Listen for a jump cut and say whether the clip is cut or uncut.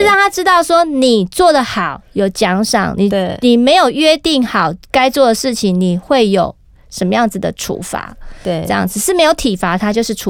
uncut